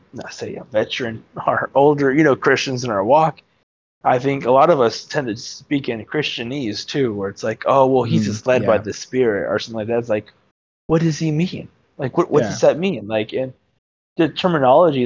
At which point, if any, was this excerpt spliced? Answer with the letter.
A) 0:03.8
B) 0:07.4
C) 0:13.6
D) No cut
D